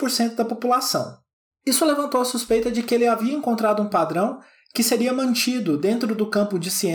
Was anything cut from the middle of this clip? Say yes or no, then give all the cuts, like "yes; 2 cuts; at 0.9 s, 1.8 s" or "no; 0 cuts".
yes; 1 cut; at 1.6 s